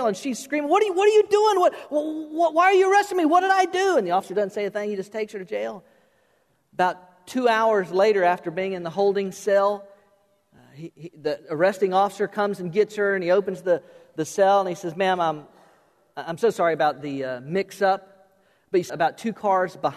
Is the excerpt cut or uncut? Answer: cut